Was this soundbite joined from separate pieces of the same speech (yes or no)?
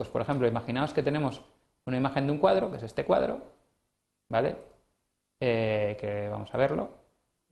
no